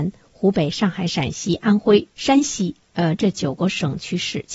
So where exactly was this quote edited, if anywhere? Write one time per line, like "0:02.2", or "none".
0:02.1